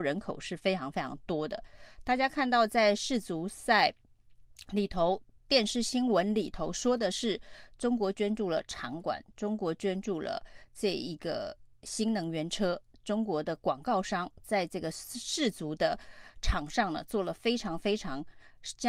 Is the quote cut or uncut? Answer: uncut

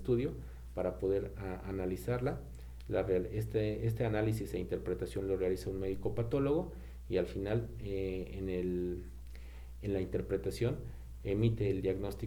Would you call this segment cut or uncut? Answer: uncut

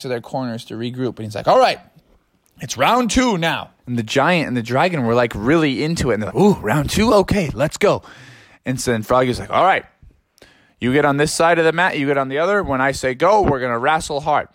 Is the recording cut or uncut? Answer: cut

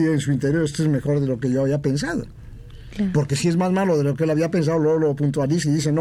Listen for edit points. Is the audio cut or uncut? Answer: uncut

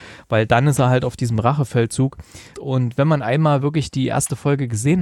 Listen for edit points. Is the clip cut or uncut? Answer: cut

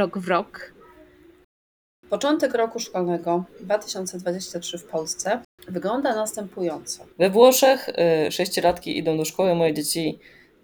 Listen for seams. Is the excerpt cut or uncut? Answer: cut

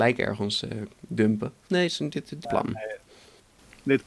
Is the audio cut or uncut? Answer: cut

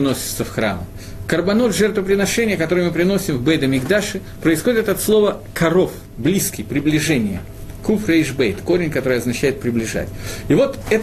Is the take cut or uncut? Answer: uncut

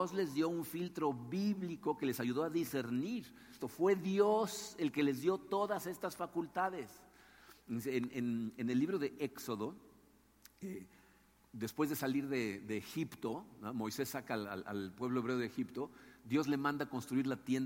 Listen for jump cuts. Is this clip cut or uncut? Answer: cut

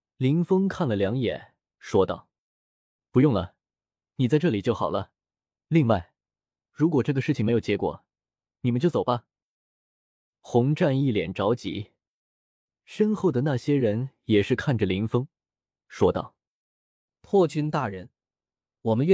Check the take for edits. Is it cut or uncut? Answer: uncut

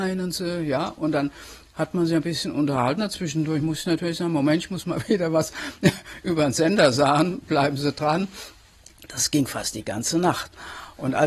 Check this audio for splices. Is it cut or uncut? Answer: uncut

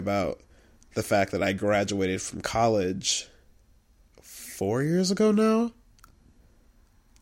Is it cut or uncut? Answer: cut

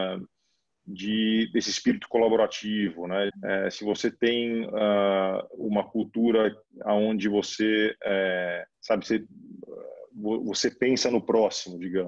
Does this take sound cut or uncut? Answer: cut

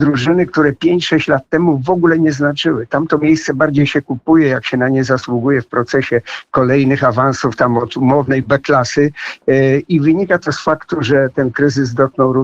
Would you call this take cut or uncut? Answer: uncut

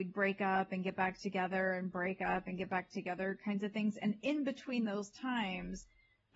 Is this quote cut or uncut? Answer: uncut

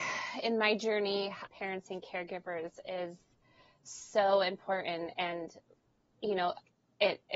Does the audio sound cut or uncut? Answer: cut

